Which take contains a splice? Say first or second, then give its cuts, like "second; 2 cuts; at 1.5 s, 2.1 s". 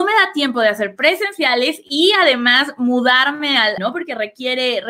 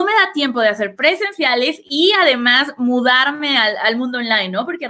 first; 1 cut; at 3.8 s